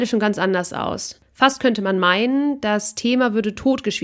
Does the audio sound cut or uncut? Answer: uncut